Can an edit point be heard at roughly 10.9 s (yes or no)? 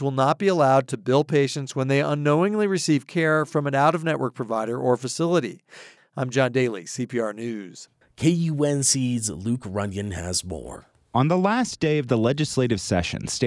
no